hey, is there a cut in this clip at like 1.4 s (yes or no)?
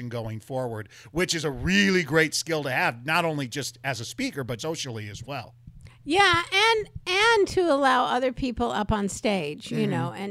no